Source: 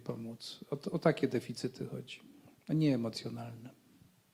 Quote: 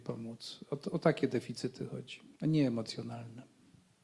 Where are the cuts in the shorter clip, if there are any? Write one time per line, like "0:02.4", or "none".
0:02.3